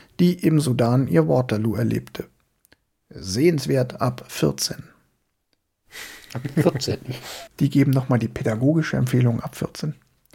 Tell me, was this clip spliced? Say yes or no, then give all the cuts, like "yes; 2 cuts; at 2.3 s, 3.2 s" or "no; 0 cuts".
yes; 1 cut; at 7.5 s